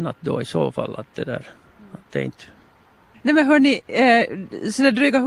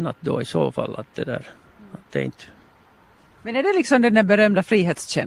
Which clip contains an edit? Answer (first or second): first